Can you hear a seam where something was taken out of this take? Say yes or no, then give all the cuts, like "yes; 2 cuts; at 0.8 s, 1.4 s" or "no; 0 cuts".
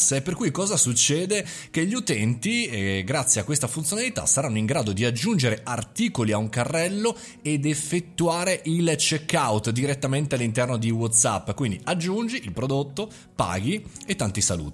no; 0 cuts